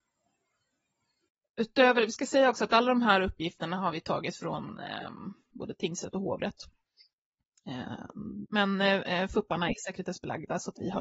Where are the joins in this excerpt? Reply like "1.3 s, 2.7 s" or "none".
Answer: 5.5 s, 8.5 s

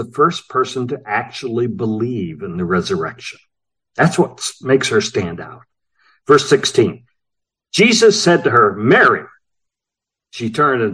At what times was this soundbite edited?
none

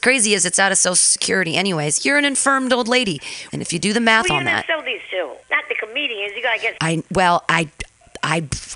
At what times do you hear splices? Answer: 3.5 s, 5.4 s, 6.8 s

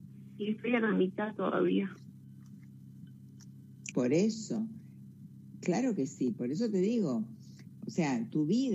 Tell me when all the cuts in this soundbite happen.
3.9 s

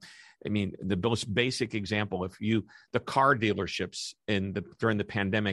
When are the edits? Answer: none

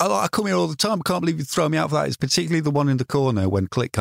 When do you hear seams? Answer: none

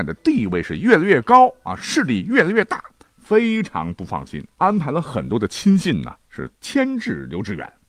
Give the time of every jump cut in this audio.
4.5 s

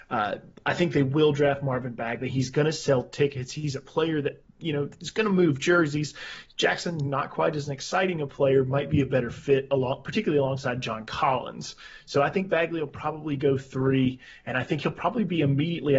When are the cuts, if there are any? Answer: 2.3 s

